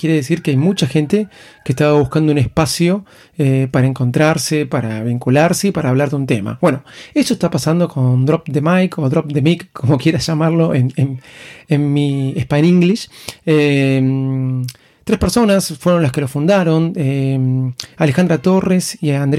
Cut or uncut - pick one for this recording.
uncut